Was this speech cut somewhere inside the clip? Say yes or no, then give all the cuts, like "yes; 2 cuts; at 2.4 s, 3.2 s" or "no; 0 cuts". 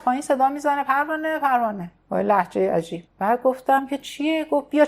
yes; 2 cuts; at 2.0 s, 3.1 s